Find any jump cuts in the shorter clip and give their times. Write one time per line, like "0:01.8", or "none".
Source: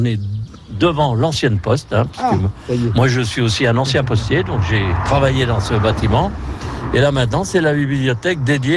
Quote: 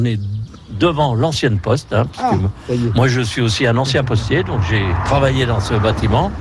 none